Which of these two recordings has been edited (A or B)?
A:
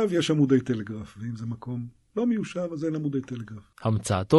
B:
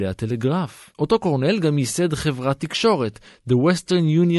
B